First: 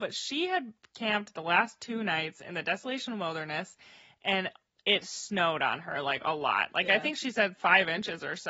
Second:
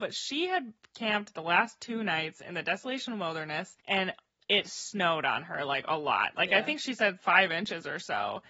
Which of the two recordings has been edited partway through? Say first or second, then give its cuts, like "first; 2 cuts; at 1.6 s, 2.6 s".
second; 1 cut; at 3.8 s